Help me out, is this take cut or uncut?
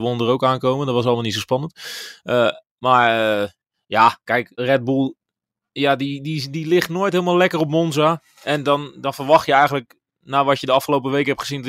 cut